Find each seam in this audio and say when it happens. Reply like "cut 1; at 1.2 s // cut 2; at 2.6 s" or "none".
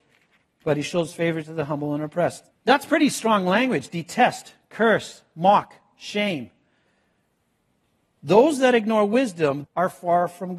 cut 1; at 2.5 s // cut 2; at 9.6 s